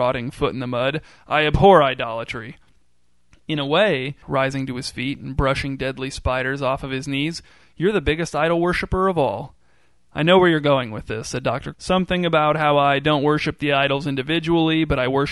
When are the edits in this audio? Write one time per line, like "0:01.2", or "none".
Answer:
0:04.2
0:11.7